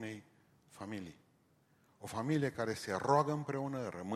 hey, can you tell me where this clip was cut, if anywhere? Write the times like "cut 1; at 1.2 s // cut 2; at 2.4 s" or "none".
none